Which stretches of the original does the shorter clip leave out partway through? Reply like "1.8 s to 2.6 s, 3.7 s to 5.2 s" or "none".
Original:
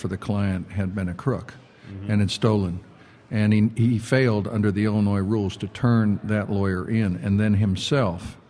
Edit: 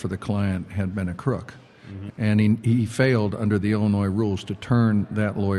2.1 s to 3.2 s